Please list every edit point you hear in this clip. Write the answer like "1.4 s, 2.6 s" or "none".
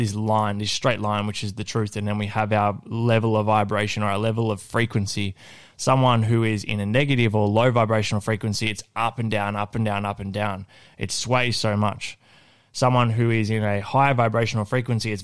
none